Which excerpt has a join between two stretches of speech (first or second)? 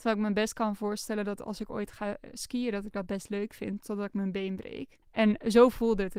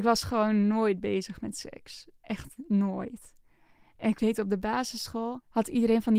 first